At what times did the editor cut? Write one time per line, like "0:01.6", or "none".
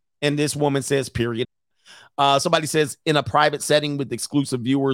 0:01.4